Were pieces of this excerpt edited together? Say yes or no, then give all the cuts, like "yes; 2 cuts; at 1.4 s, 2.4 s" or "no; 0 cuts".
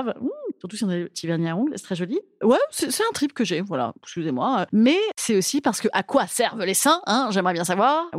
no; 0 cuts